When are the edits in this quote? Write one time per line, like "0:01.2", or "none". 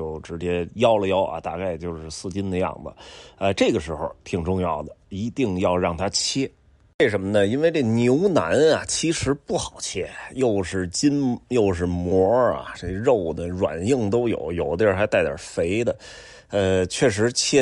none